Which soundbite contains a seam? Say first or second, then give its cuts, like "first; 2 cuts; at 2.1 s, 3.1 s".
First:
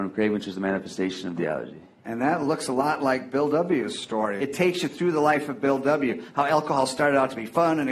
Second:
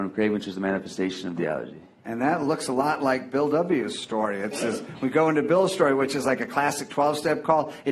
first; 1 cut; at 4.4 s